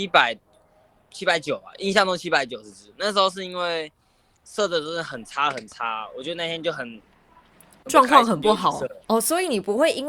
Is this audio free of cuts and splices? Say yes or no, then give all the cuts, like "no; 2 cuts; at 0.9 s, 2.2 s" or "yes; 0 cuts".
no; 1 cut; at 9.0 s